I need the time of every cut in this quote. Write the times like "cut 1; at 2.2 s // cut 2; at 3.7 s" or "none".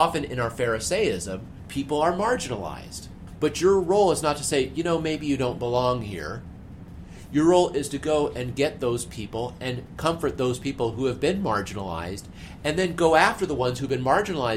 none